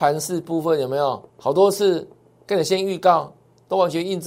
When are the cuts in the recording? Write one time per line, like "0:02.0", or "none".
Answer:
0:01.3

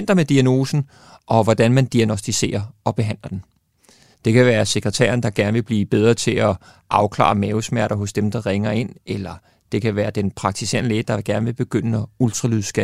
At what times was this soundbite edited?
0:04.1

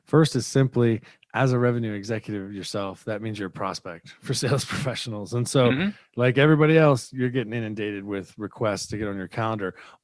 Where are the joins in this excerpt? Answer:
none

